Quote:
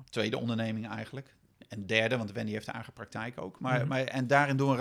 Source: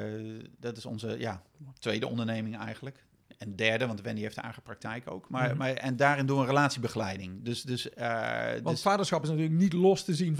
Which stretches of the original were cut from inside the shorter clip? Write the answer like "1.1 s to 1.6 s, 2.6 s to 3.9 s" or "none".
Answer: none